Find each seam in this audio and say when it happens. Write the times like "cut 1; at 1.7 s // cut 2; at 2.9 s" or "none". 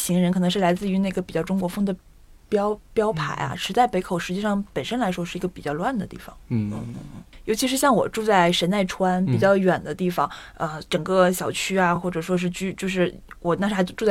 none